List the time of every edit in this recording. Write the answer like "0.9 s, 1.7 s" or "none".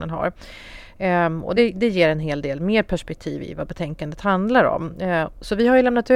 none